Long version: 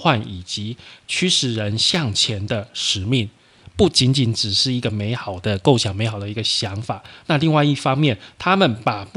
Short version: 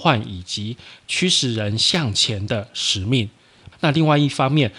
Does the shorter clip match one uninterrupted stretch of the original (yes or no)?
no